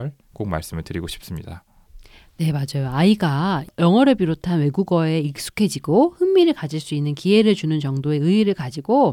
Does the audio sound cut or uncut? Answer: uncut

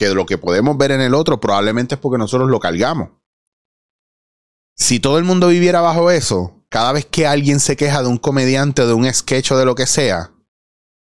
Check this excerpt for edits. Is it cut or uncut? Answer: uncut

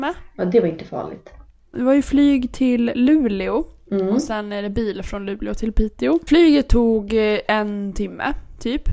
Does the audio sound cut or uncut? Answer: cut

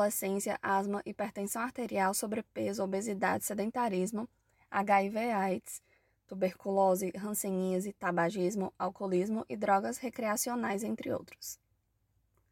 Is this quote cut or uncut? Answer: uncut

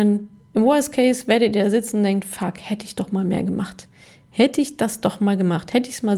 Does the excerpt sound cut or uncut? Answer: uncut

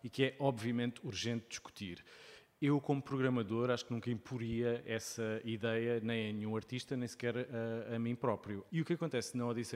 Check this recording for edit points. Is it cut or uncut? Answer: cut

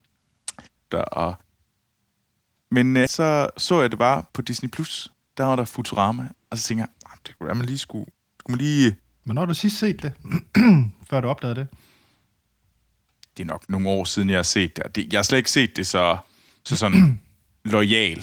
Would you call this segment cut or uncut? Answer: cut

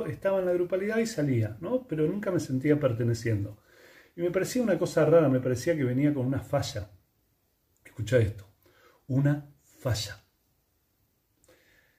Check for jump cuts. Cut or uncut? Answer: uncut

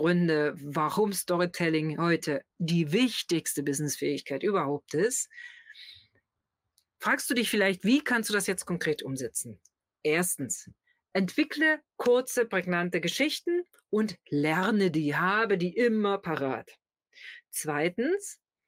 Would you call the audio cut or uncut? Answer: uncut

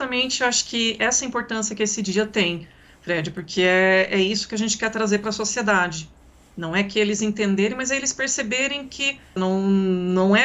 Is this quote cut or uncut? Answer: cut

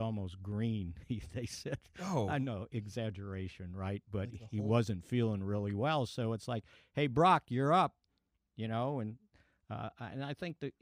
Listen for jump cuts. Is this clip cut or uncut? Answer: uncut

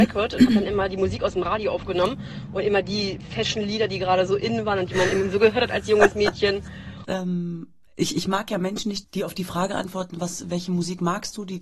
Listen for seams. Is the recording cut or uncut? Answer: cut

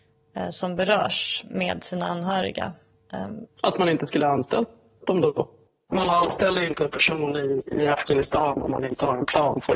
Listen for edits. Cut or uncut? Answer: cut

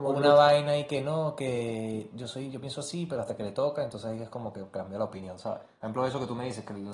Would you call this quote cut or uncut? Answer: uncut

